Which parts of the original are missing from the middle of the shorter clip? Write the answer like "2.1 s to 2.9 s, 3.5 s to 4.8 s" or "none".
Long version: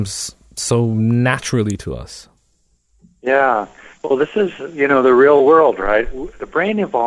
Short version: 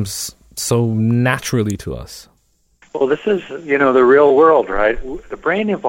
2.8 s to 3.9 s